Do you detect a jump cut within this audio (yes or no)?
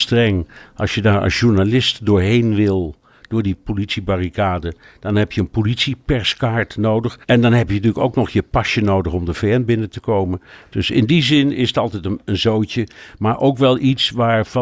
yes